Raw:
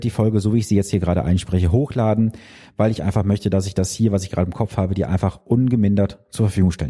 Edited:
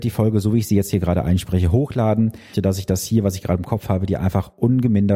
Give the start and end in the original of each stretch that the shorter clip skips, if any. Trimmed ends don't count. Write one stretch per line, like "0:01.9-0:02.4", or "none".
0:02.5-0:03.4